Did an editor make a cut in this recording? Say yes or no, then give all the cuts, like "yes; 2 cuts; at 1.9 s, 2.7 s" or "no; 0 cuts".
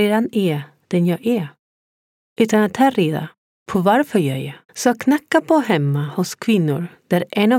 yes; 1 cut; at 4.6 s